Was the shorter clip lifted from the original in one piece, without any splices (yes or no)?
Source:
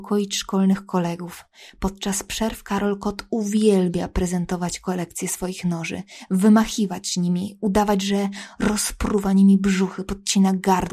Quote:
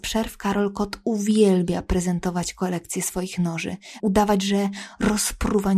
no